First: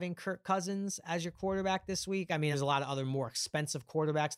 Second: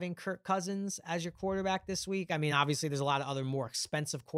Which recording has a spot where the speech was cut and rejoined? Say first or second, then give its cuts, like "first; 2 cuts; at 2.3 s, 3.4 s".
first; 1 cut; at 2.5 s